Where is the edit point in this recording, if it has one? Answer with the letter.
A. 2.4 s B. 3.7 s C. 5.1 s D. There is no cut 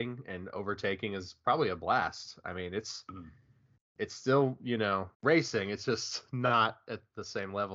C